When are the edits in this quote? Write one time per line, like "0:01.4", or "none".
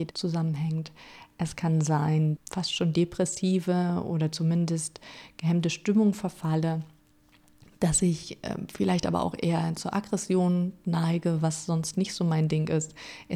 0:02.4